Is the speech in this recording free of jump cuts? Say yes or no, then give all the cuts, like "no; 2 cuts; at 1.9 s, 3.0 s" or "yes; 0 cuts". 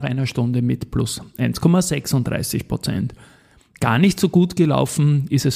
yes; 0 cuts